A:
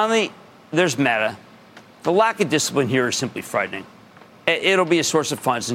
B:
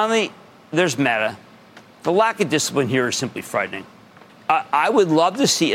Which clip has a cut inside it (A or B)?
B